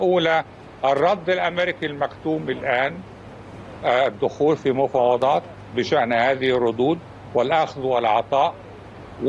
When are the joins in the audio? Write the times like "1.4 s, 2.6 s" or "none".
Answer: none